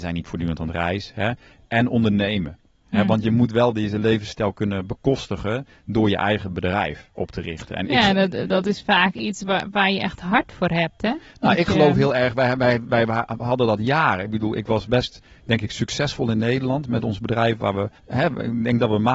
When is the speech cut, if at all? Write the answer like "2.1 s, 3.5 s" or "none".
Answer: 18.0 s